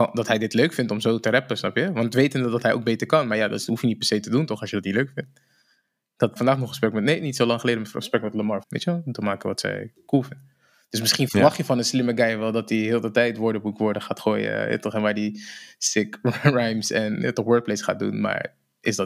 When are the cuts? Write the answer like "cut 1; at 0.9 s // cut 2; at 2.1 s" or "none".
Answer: cut 1; at 6.4 s // cut 2; at 8.6 s